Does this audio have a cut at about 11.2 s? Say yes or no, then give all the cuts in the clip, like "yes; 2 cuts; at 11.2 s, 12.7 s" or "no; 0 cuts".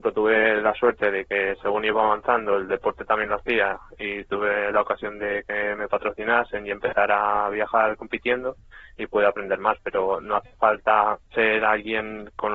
yes; 1 cut; at 11.2 s